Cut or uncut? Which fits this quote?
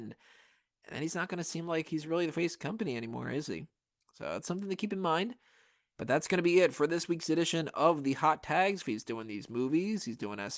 cut